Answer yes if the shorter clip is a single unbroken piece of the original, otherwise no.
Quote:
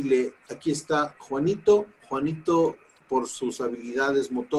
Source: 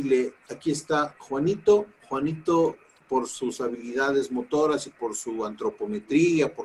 yes